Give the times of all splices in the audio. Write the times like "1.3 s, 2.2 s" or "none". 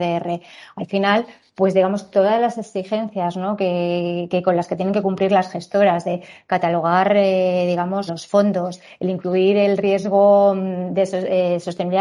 4.3 s, 8.1 s